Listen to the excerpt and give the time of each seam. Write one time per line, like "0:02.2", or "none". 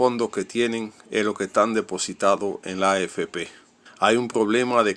0:03.9